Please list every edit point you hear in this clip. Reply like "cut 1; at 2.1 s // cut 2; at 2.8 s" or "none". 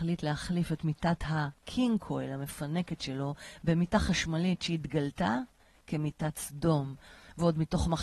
none